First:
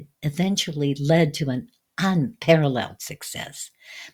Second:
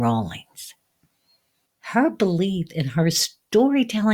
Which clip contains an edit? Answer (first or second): second